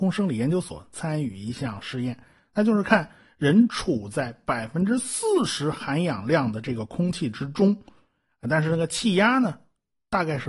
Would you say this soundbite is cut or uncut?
uncut